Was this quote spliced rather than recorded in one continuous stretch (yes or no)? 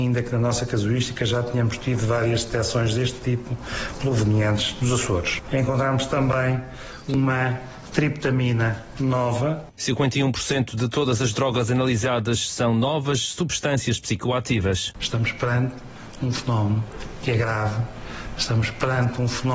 yes